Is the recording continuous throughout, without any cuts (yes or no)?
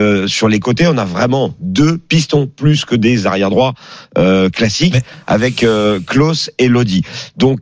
yes